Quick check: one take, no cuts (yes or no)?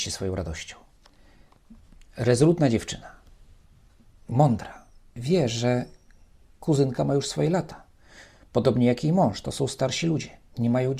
yes